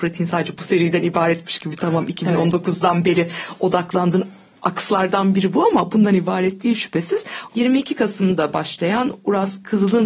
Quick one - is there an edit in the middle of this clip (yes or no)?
yes